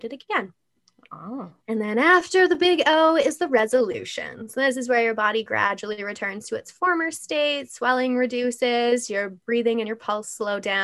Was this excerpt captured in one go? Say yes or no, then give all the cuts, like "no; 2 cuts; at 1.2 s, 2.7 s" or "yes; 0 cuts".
no; 1 cut; at 1.6 s